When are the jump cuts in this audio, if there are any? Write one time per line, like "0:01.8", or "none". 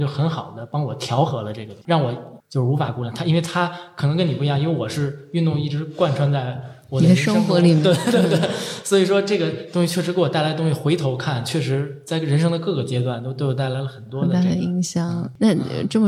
0:02.4